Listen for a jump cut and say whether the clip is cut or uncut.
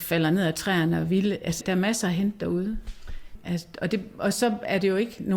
cut